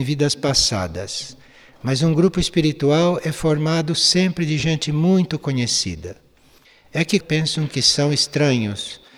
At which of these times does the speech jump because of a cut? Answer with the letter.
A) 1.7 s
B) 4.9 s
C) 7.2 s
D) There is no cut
C